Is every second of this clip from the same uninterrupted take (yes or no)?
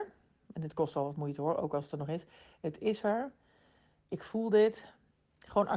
yes